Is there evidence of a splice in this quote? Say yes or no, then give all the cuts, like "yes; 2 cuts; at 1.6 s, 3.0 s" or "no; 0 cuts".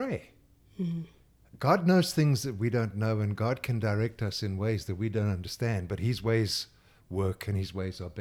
no; 0 cuts